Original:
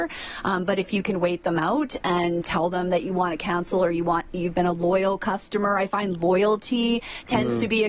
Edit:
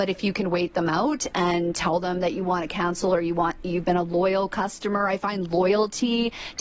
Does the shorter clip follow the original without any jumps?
yes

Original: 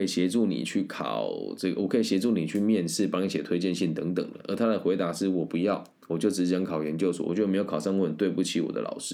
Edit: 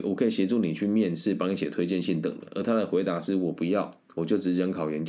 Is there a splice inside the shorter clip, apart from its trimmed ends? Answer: yes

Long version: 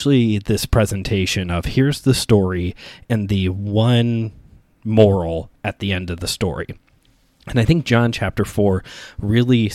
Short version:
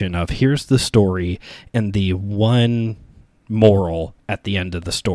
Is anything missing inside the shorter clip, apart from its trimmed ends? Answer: no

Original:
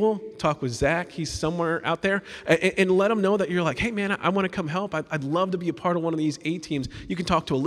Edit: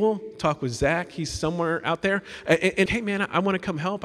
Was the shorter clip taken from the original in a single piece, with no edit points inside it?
no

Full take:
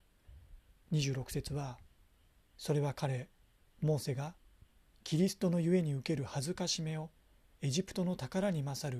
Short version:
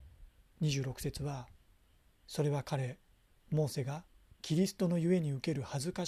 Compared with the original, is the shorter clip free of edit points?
no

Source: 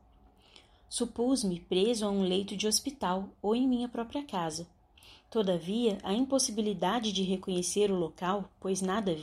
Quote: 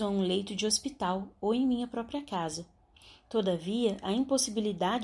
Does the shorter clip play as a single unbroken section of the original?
yes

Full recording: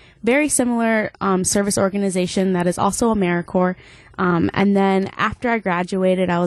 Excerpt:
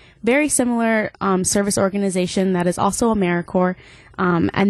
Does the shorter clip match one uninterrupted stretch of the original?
yes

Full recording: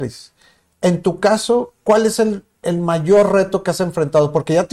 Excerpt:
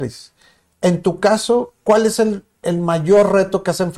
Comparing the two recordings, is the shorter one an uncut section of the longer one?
yes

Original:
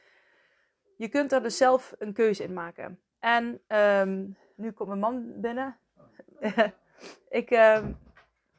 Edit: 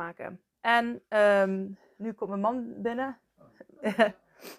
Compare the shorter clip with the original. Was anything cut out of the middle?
no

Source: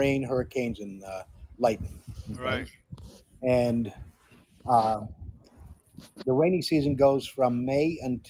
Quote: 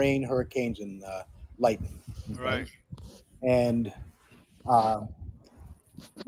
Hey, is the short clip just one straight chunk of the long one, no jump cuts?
yes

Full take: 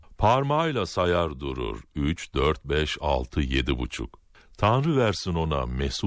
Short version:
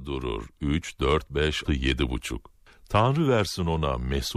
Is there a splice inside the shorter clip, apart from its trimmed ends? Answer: yes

